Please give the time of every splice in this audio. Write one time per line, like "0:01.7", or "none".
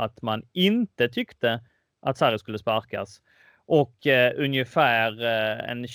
none